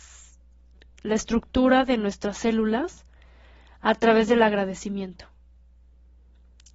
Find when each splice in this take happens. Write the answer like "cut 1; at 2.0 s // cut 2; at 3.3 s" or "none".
none